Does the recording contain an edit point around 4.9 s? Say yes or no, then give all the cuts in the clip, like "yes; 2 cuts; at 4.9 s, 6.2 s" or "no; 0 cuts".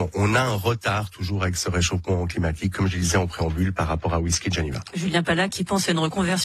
no; 0 cuts